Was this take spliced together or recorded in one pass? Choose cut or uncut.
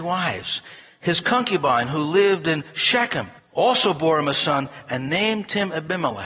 uncut